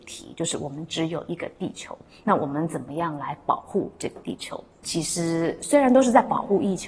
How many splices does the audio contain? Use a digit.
1